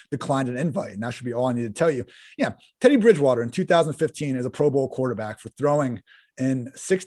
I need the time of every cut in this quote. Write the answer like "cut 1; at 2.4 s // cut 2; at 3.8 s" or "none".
none